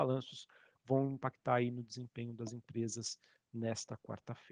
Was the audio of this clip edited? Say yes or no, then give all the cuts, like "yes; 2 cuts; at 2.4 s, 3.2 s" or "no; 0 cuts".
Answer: no; 0 cuts